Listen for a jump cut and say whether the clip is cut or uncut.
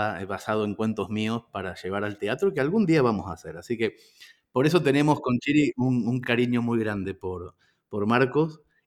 uncut